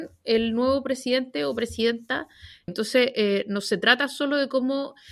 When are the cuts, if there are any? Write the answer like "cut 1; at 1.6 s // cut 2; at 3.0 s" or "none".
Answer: cut 1; at 2.7 s